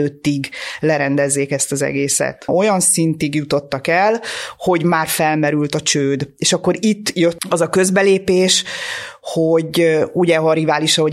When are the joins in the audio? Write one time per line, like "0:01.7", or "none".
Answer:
0:02.5